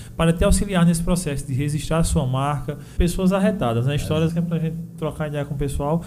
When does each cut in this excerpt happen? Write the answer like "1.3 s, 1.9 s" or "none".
3.0 s, 4.3 s